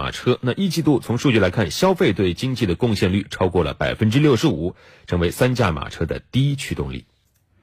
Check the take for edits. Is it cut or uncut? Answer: uncut